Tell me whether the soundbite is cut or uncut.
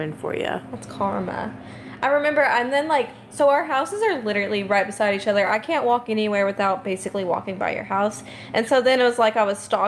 uncut